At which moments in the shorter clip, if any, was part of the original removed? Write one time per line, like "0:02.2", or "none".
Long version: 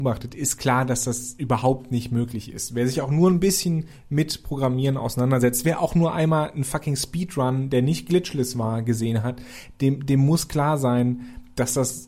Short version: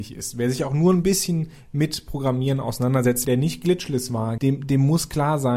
0:03.2
0:04.4